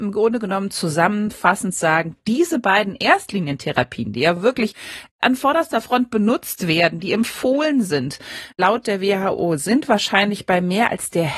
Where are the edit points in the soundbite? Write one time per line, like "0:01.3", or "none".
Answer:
none